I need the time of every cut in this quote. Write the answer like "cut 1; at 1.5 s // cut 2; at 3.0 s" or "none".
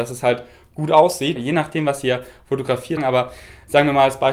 cut 1; at 1.4 s // cut 2; at 3.0 s